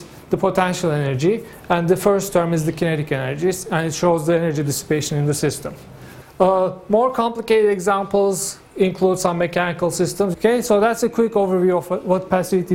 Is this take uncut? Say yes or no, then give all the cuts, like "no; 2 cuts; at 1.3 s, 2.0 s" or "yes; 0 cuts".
no; 2 cuts; at 6.2 s, 10.3 s